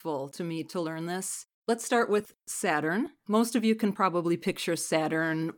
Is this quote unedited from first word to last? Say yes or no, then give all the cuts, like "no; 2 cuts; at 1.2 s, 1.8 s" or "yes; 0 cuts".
no; 2 cuts; at 1.5 s, 3.2 s